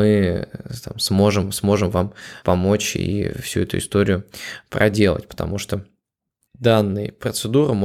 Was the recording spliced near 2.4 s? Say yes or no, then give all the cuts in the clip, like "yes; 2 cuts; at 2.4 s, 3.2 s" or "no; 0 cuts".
yes; 2 cuts; at 2.4 s, 6.5 s